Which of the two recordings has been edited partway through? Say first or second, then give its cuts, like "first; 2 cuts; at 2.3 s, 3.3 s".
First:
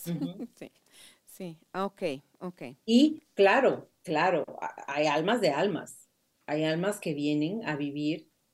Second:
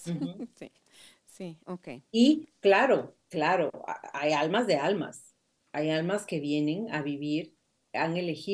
second; 1 cut; at 1.6 s